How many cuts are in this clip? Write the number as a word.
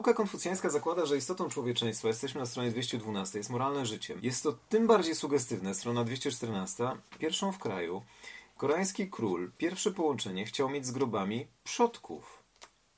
two